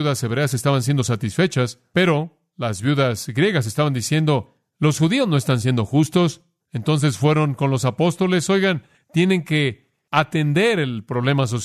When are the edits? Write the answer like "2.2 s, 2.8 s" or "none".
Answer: none